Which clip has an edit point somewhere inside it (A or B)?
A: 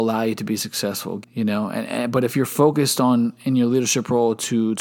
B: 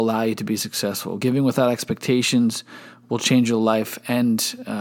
A